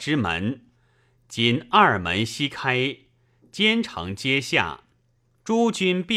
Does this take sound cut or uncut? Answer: uncut